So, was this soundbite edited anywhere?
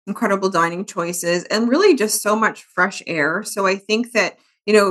no; 0 cuts

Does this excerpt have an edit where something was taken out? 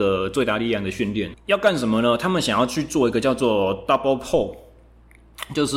yes; 1 cut; at 1.3 s

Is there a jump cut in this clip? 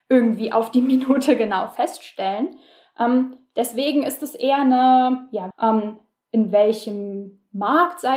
yes; 1 cut; at 5.5 s

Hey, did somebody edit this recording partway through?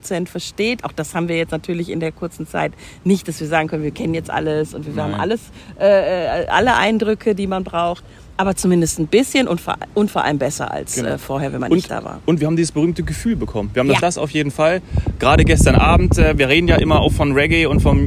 yes; 1 cut; at 14.0 s

